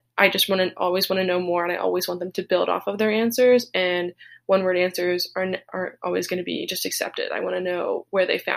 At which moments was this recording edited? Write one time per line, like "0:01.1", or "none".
none